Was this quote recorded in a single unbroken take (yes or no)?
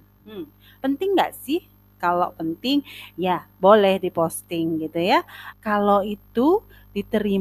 no